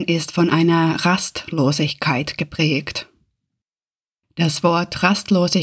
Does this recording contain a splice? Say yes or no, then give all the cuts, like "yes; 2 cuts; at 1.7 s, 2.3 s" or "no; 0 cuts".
no; 0 cuts